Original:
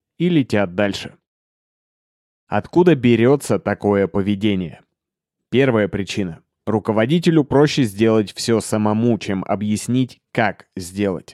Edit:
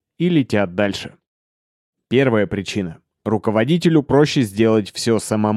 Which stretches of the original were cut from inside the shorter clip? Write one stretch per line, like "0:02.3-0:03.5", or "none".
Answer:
0:01.9-0:05.3